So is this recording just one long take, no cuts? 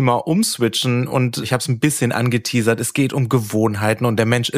yes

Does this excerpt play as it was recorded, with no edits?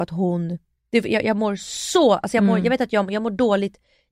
yes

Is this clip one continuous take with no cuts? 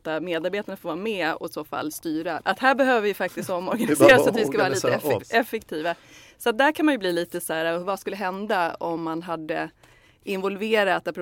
no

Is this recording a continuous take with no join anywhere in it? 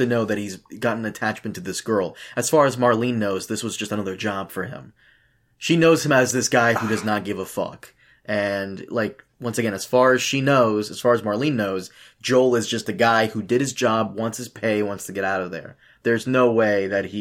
yes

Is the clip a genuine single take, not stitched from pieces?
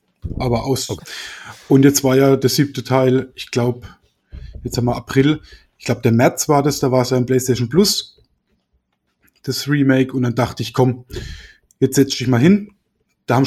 no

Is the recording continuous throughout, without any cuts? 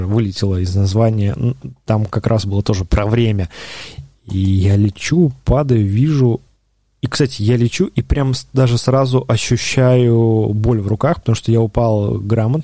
yes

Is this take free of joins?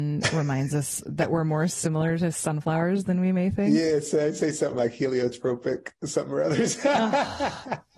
yes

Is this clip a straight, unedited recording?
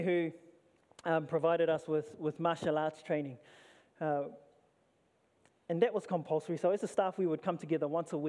yes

